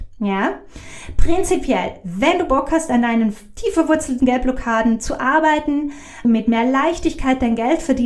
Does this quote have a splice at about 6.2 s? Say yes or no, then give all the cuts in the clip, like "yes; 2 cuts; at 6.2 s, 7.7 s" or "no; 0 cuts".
yes; 1 cut; at 6.2 s